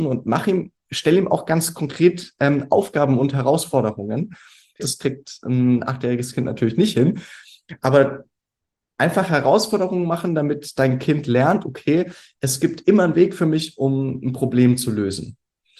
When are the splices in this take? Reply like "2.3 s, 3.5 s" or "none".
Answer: 4.8 s